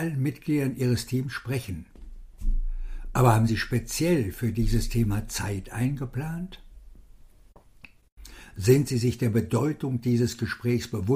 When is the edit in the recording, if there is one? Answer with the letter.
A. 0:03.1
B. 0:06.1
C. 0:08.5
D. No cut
D